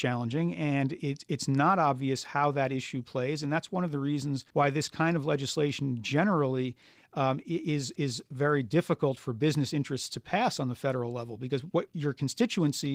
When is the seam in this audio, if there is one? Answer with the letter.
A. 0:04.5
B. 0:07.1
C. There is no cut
A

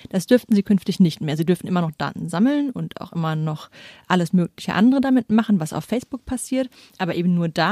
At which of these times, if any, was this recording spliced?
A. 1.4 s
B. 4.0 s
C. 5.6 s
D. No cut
D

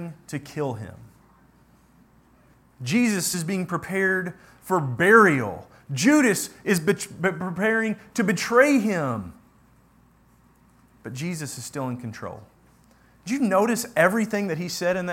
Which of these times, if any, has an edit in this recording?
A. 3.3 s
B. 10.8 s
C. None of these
A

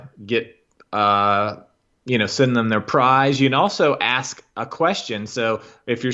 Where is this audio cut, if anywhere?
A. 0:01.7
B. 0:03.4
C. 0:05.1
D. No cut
D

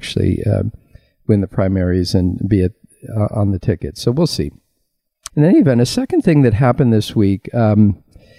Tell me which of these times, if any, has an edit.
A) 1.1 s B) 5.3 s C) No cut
B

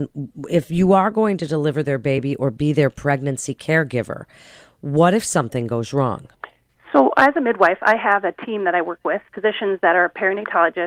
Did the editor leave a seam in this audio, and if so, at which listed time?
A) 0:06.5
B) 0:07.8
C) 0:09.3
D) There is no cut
C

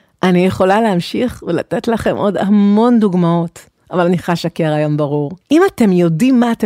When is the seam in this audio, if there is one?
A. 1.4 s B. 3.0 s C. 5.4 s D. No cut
C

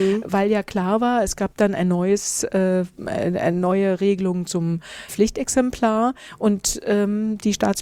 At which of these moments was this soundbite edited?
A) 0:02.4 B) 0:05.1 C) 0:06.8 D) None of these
B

